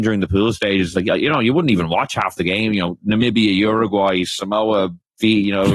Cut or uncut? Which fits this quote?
uncut